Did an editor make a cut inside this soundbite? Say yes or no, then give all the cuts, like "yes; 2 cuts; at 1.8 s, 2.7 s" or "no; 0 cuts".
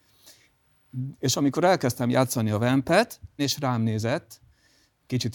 yes; 2 cuts; at 1.1 s, 3.4 s